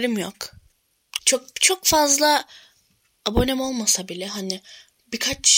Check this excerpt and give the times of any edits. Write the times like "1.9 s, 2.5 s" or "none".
1.2 s